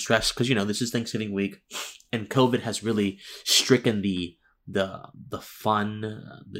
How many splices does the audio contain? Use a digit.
0